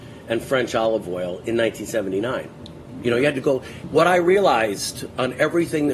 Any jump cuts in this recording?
no; 0 cuts

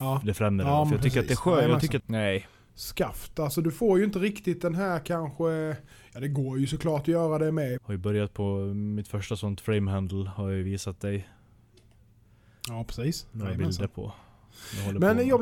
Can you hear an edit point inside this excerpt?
yes; 2 cuts; at 2.0 s, 7.8 s

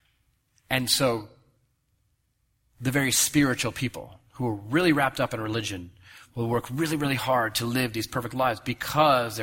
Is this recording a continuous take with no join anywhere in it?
yes; 0 cuts

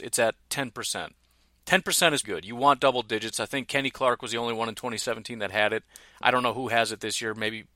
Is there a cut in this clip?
yes; 1 cut; at 2.2 s

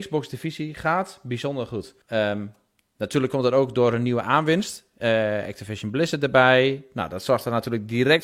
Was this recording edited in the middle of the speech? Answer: yes; 1 cut; at 2.0 s

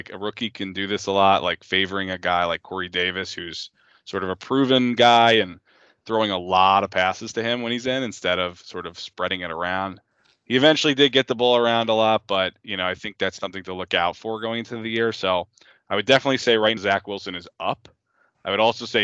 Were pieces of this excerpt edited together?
yes; 1 cut; at 16.8 s

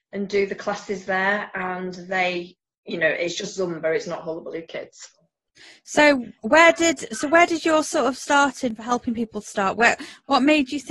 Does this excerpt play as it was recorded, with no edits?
yes; 0 cuts

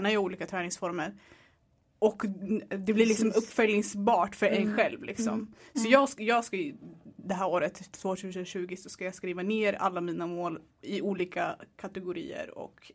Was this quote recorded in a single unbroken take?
yes; 0 cuts

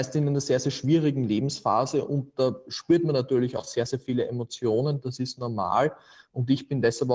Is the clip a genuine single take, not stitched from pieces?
yes; 0 cuts

